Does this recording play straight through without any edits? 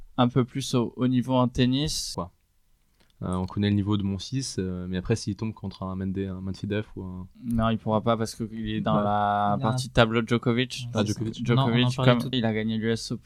no; 2 cuts; at 2.1 s, 12.3 s

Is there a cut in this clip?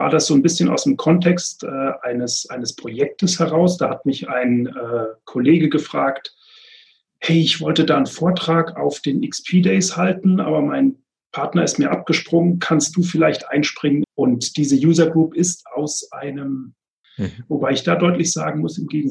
yes; 2 cuts; at 14.0 s, 17.0 s

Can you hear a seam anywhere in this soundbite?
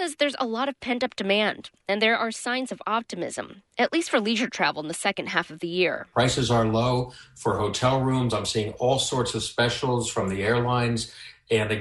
no; 0 cuts

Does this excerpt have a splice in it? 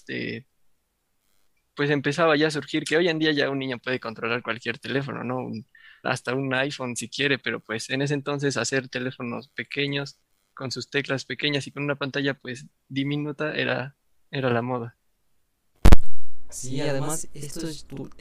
yes; 1 cut; at 6.0 s

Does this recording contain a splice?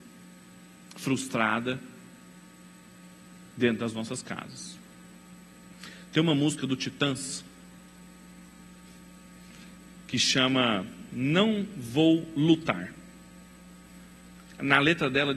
no; 0 cuts

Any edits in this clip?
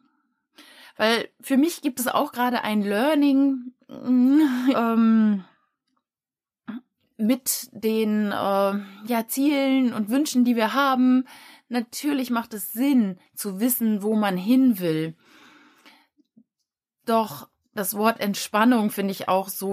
yes; 1 cut; at 4.7 s

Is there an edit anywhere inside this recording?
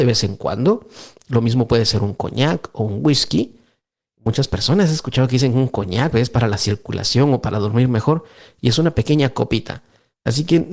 no; 0 cuts

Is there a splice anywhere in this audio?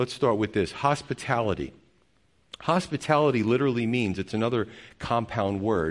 no; 0 cuts

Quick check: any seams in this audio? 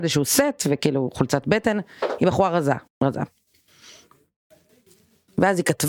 yes; 1 cut; at 2.9 s

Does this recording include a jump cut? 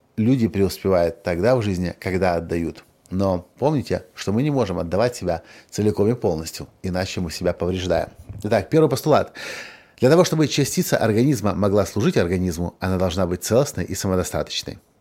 no; 0 cuts

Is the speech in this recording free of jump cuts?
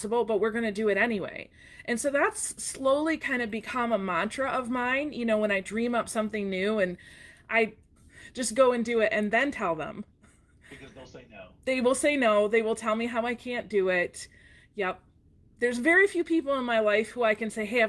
no; 1 cut; at 8.0 s

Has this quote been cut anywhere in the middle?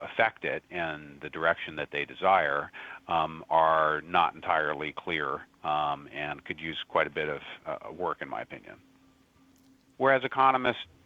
yes; 1 cut; at 9.9 s

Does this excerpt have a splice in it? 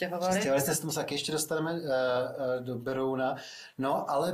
no; 0 cuts

